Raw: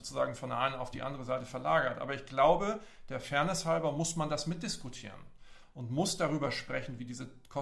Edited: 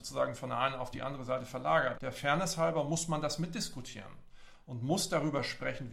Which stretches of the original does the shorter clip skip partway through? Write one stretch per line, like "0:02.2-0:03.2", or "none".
0:01.9-0:03.0